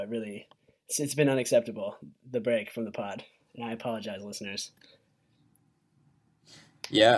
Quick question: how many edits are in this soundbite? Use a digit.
0